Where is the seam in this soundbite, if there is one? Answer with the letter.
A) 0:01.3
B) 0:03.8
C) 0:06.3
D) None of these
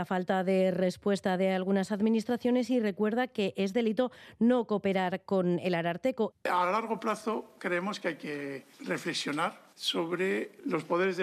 C